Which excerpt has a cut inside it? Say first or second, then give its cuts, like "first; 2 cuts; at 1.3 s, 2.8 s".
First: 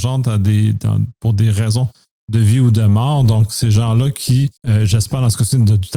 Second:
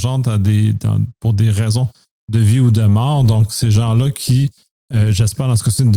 first; 1 cut; at 4.6 s